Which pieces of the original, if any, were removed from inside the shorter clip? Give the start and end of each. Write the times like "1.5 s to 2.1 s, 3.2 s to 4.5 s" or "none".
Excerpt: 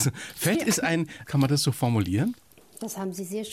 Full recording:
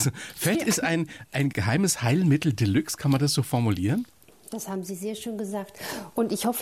1.3 s to 3.0 s